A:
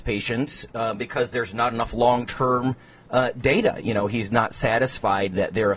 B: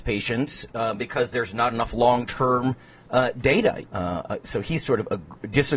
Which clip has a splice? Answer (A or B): B